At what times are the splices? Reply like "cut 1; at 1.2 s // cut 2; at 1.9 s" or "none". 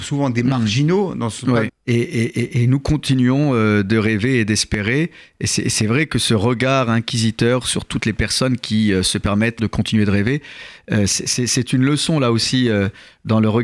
cut 1; at 1.7 s // cut 2; at 9.6 s

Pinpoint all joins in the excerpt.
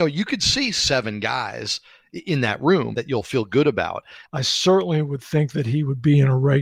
cut 1; at 2.9 s // cut 2; at 4.2 s

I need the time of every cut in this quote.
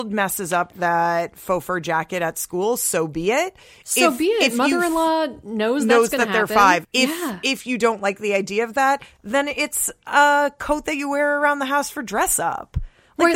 cut 1; at 6.8 s

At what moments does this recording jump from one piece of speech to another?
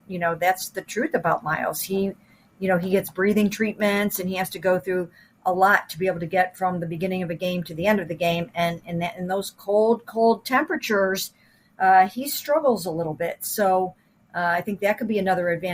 none

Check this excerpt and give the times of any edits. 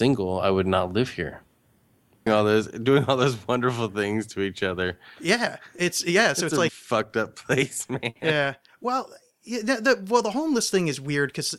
cut 1; at 2.3 s // cut 2; at 6.7 s

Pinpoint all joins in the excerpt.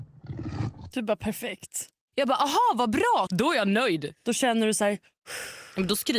cut 1; at 3.3 s

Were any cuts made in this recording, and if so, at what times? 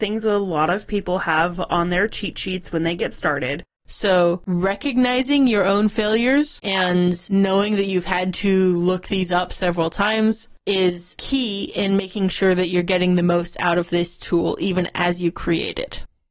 cut 1; at 3.8 s

